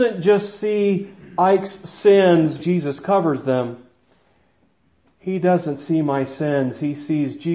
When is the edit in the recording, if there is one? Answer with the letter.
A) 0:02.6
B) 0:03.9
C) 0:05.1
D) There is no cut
A